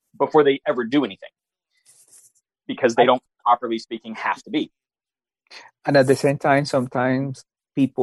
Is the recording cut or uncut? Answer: uncut